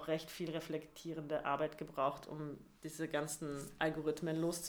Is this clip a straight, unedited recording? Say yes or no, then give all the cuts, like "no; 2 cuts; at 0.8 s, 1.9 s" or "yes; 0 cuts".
yes; 0 cuts